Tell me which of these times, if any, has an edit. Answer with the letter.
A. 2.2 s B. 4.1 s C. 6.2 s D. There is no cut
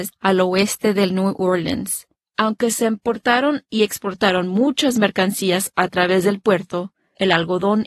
A